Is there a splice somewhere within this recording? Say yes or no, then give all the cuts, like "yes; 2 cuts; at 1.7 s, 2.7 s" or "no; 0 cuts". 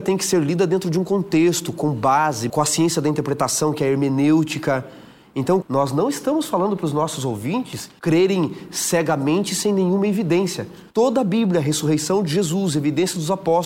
yes; 2 cuts; at 2.5 s, 5.6 s